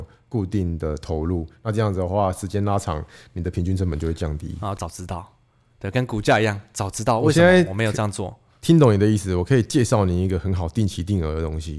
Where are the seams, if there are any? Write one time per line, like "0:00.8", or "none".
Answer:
0:04.8